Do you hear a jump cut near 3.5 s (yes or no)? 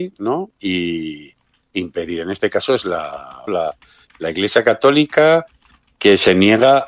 yes